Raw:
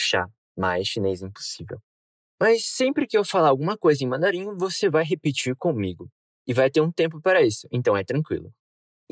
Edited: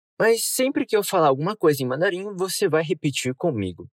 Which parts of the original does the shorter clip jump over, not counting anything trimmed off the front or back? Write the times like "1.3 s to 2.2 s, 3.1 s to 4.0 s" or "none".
none

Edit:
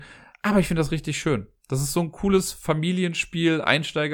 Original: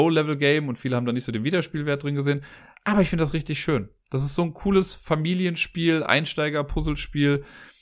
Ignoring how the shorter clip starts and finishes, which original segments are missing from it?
none

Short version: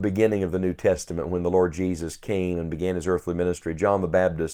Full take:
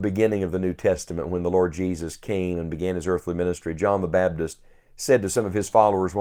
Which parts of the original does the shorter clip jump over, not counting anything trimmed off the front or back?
none

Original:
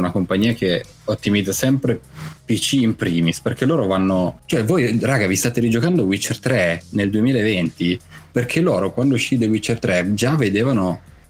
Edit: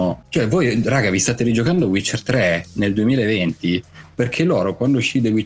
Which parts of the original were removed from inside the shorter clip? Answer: none

